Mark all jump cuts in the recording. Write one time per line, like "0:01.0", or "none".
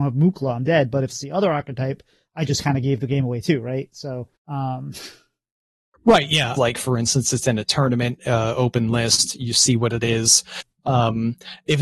0:04.4
0:06.6